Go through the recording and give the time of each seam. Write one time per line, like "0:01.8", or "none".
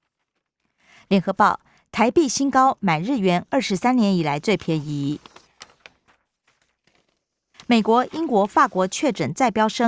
0:07.5

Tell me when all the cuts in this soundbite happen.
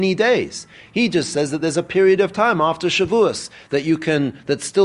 none

